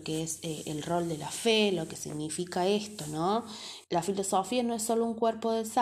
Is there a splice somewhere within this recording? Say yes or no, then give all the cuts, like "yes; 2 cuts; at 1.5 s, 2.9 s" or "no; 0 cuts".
yes; 1 cut; at 3.8 s